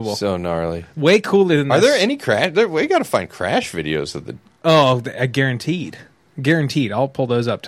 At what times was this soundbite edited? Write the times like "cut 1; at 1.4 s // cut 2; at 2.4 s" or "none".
none